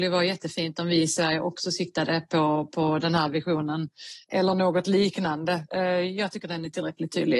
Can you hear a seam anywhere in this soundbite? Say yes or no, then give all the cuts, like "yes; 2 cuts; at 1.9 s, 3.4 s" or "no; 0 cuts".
no; 0 cuts